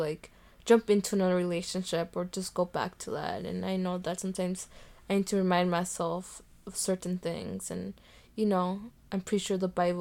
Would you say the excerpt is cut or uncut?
uncut